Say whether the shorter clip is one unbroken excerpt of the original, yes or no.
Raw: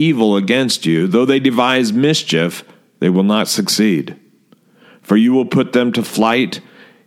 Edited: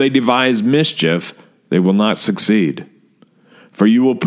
yes